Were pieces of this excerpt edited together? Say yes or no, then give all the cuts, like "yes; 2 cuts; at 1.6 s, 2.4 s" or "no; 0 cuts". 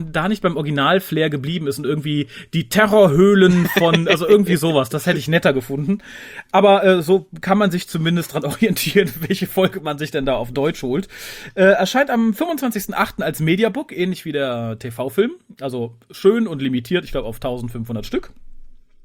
no; 0 cuts